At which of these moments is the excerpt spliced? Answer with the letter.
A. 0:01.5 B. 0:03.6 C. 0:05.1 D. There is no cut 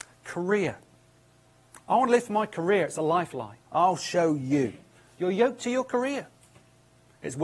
B